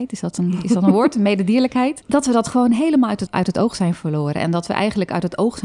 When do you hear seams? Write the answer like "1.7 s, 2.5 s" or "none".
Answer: 2.0 s, 3.3 s